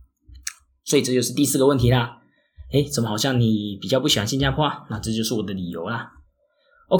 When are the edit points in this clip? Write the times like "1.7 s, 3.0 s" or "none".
none